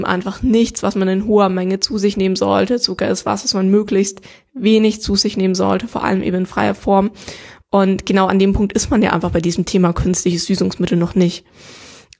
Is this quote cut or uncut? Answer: uncut